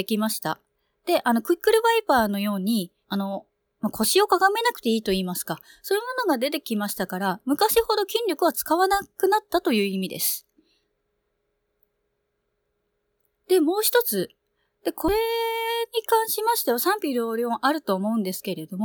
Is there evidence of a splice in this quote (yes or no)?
yes